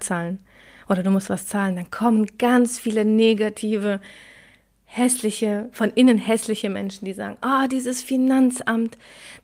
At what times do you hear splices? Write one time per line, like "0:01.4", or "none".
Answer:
none